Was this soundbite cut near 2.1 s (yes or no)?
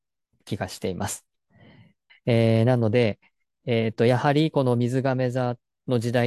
yes